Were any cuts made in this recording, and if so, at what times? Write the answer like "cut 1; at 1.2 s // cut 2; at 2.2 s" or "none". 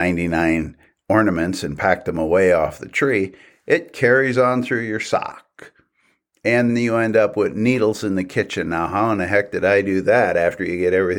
cut 1; at 6.7 s